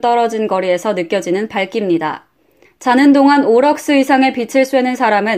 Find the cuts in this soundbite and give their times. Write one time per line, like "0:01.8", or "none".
0:02.6